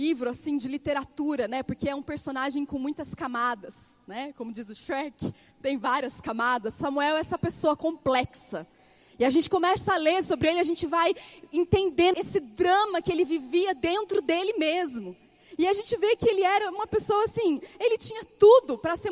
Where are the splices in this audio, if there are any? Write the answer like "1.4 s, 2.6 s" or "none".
12.1 s